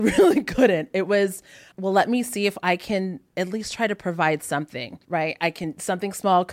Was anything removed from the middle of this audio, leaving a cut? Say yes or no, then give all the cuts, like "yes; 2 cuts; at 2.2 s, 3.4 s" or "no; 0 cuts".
yes; 2 cuts; at 1.7 s, 5.0 s